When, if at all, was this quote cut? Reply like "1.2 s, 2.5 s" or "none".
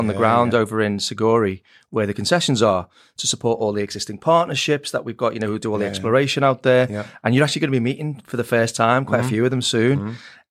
none